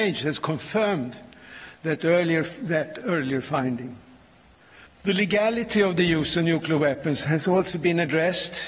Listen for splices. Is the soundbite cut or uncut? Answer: cut